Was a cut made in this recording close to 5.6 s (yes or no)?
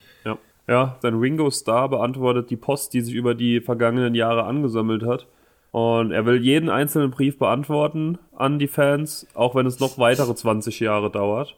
no